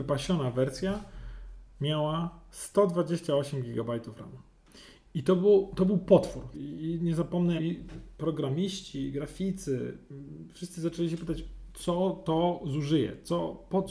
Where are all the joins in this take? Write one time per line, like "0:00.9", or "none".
0:06.5
0:07.6